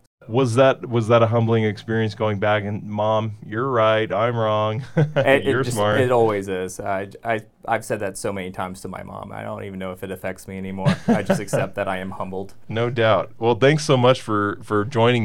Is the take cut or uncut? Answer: uncut